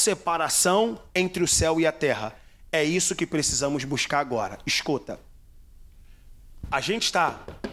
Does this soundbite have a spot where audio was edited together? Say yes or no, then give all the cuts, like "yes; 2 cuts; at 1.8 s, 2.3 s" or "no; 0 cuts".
no; 0 cuts